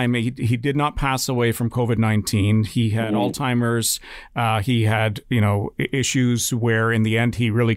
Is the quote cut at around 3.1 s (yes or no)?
no